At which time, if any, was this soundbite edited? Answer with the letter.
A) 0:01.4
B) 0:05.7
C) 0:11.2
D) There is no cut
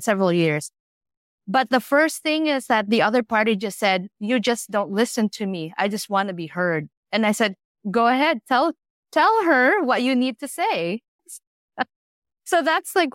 C